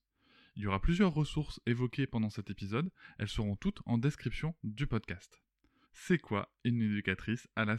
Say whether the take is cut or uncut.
cut